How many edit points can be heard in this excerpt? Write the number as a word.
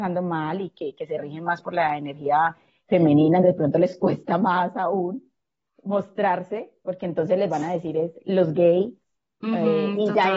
one